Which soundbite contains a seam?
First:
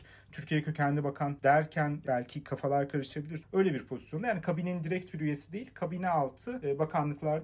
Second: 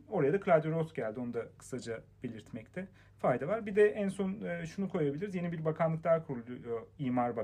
first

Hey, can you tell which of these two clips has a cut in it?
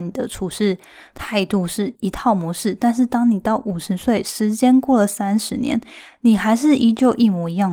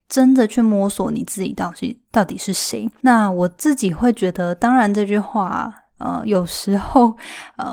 first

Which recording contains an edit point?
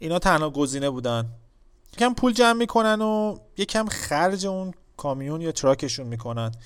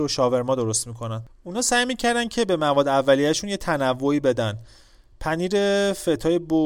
first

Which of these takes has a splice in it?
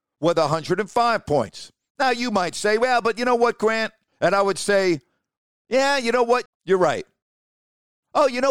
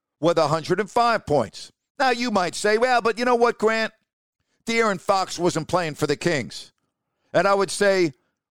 first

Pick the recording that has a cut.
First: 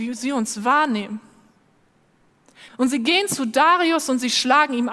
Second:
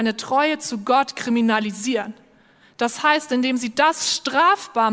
first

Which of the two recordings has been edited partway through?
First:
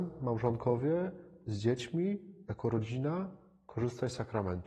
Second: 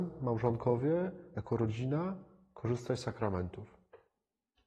second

